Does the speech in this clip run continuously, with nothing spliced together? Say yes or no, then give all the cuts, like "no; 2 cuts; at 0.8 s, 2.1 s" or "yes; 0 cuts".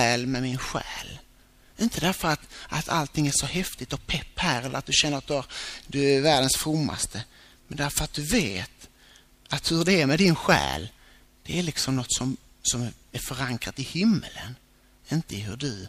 yes; 0 cuts